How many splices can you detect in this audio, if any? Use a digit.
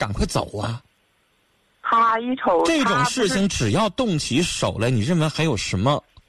0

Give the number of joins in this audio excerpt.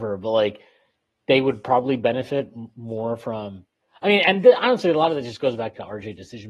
0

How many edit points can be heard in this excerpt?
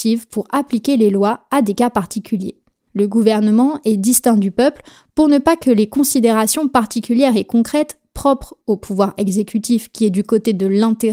0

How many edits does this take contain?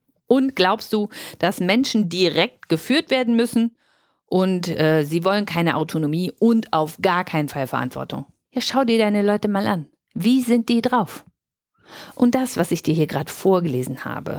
0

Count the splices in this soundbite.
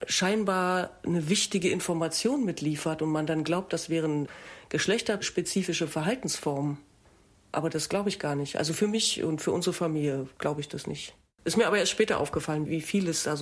1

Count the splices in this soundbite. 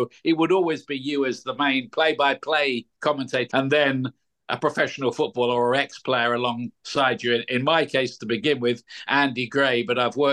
1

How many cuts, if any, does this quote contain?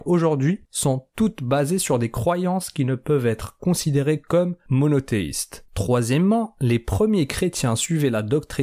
1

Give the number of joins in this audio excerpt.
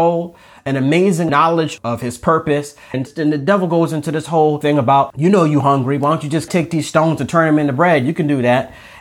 1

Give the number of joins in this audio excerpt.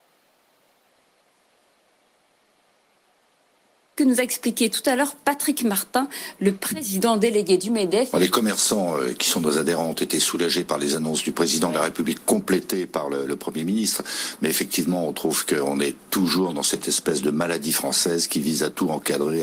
1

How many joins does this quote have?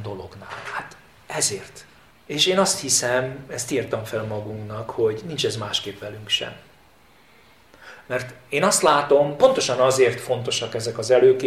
1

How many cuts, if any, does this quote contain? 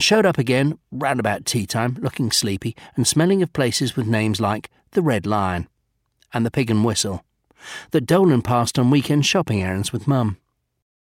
0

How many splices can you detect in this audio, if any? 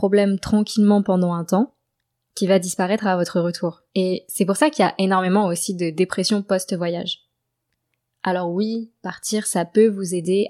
1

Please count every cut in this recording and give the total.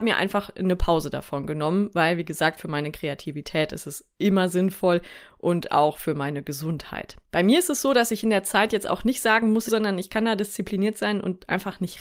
2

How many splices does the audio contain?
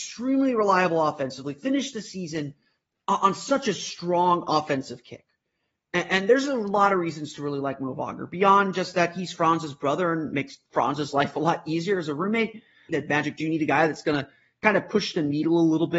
1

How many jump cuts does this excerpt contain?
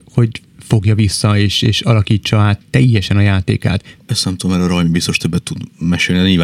1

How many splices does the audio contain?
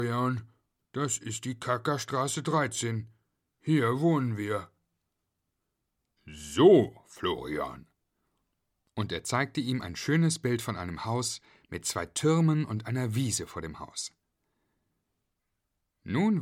1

